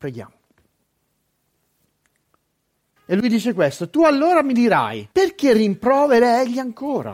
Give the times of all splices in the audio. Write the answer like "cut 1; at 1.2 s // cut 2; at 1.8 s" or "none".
cut 1; at 3.0 s // cut 2; at 5.1 s